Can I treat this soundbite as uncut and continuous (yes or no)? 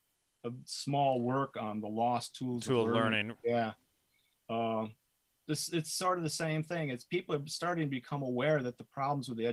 no